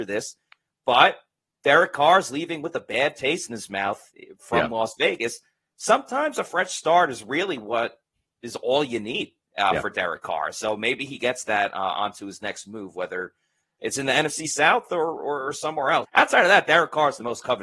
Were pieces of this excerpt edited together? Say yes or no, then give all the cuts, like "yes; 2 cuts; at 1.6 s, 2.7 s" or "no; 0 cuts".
yes; 1 cut; at 16.0 s